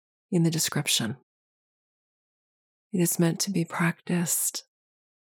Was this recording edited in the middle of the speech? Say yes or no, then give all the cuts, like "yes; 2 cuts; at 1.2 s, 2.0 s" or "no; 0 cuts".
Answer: yes; 1 cut; at 2.8 s